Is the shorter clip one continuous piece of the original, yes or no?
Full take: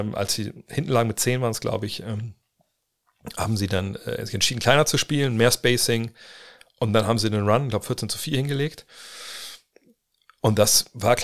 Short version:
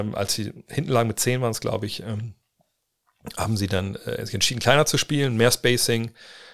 yes